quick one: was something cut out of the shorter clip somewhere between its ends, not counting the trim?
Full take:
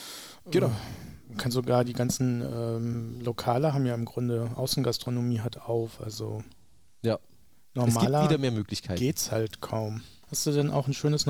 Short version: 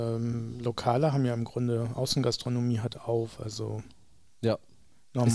no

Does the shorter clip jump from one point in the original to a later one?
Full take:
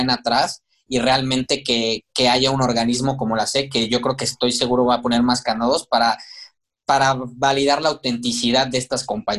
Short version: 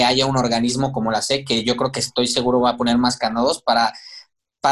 no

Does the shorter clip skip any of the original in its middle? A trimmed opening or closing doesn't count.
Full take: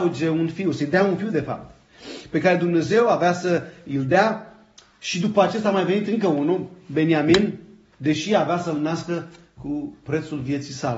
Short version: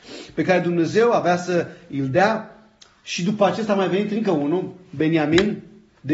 no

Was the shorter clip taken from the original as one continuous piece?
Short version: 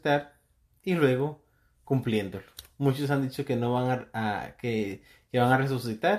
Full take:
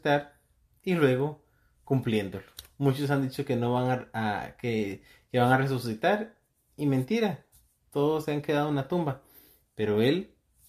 yes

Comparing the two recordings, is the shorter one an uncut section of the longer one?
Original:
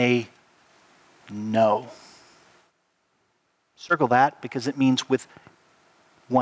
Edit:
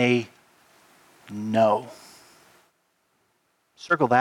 yes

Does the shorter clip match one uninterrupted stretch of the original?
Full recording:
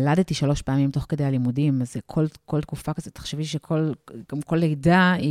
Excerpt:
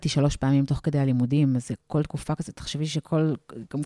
no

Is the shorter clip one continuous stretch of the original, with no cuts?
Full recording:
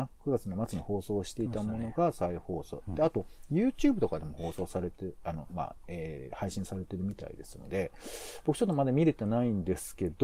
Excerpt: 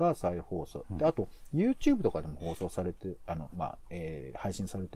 yes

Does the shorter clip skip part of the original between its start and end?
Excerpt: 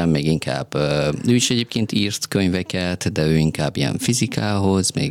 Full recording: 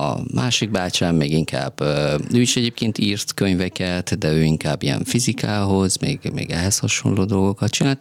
no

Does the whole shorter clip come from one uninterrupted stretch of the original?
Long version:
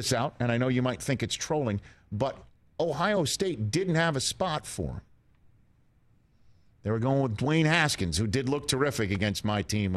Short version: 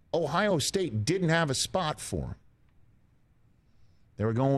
yes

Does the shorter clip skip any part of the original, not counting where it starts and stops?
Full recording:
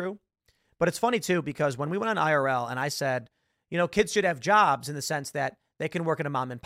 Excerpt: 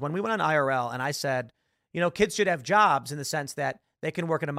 no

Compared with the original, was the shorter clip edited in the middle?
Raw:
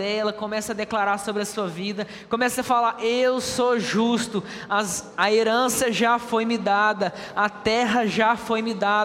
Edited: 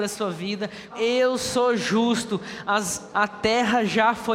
yes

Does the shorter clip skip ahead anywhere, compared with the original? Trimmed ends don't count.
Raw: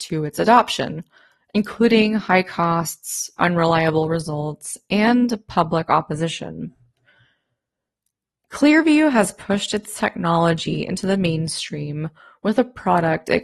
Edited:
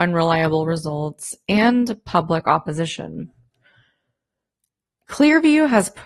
no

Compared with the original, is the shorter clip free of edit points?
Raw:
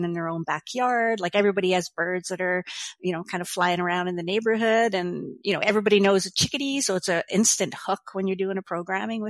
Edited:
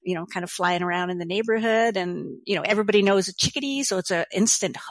yes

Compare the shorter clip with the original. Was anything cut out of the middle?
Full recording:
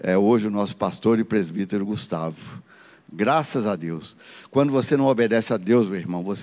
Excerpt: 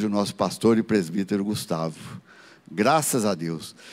no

